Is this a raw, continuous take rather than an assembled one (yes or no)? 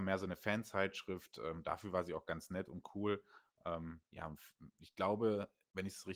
yes